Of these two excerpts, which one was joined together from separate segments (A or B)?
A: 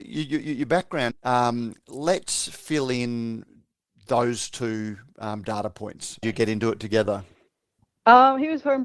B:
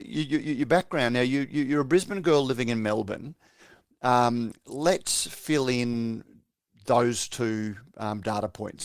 A